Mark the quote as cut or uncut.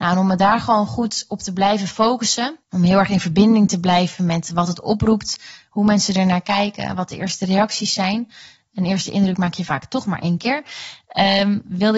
cut